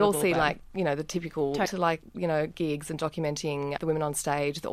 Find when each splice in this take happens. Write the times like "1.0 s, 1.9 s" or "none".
1.7 s, 3.8 s